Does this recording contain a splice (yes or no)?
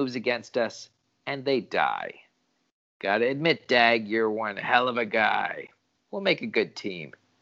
no